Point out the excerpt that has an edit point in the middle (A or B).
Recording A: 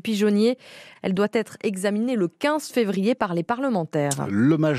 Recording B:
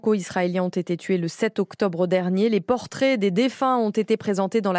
A